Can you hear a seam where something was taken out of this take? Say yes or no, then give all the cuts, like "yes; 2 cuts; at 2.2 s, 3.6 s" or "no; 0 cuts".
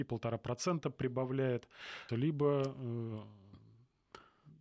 yes; 1 cut; at 2.1 s